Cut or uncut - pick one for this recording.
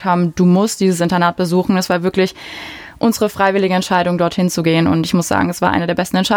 uncut